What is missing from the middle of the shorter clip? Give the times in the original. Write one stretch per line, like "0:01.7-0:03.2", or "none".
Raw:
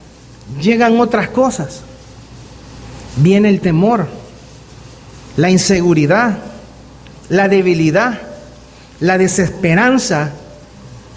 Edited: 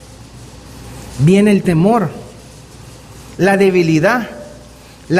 0:05.3-0:07.3